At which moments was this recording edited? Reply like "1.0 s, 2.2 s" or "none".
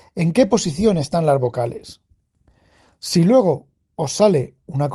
none